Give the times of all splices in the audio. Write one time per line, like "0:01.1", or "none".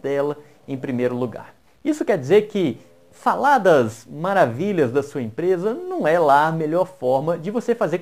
0:01.7